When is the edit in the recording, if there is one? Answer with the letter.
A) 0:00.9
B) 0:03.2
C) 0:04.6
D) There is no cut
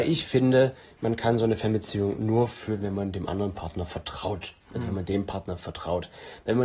C